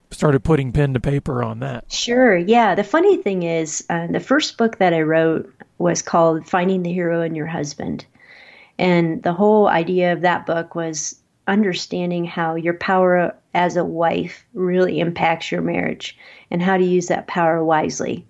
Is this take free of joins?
yes; 0 cuts

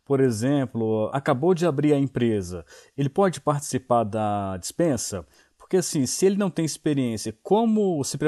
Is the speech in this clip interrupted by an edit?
yes; 1 cut; at 1.1 s

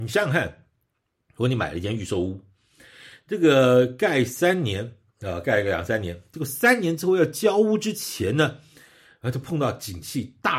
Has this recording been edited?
no; 0 cuts

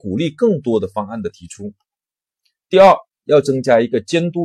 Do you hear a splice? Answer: no; 0 cuts

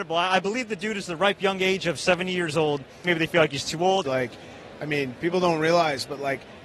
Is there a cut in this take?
yes; 2 cuts; at 3.0 s, 4.0 s

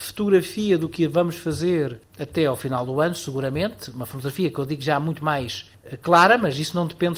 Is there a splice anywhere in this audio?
no; 0 cuts

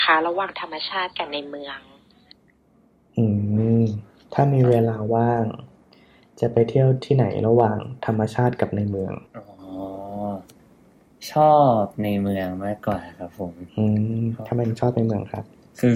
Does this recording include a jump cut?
yes; 2 cuts; at 9.3 s, 13.7 s

